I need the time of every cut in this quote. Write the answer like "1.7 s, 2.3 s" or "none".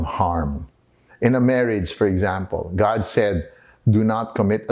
1.1 s